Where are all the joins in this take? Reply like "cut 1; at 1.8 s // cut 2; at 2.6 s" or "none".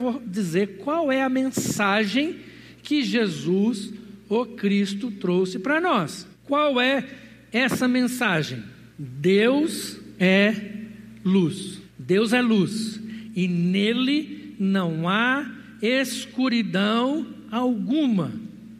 none